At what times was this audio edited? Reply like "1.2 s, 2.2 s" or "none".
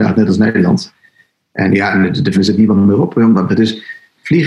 2.3 s, 3.5 s